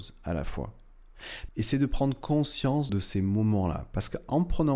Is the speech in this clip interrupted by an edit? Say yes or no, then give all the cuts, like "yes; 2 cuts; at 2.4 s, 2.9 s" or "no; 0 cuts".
yes; 2 cuts; at 1.5 s, 2.9 s